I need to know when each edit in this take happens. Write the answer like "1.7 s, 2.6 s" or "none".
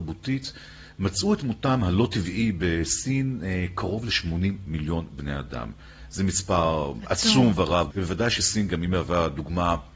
7.9 s